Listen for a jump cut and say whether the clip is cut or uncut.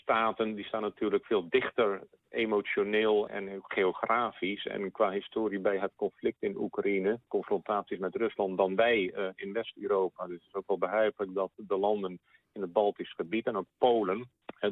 uncut